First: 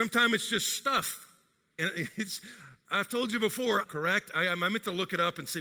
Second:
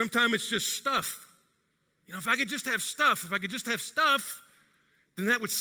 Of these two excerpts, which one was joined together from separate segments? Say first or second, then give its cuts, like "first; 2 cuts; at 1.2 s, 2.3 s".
first; 2 cuts; at 1.8 s, 3.8 s